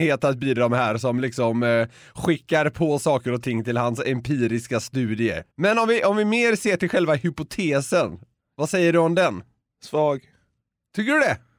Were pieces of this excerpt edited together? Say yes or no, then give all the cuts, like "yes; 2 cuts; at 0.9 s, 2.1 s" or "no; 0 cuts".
yes; 1 cut; at 5.5 s